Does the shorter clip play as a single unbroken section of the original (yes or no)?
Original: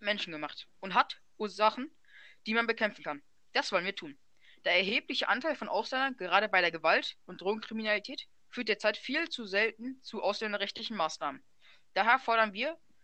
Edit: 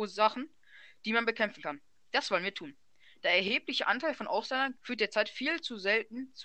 no